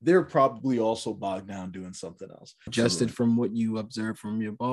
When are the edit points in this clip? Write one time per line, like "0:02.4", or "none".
0:02.7